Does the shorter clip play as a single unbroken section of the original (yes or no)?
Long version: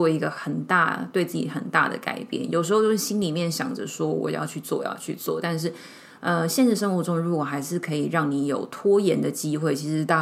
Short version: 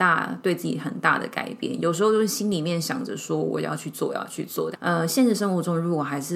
no